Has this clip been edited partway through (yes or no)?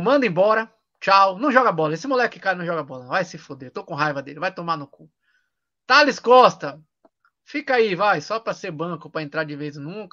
no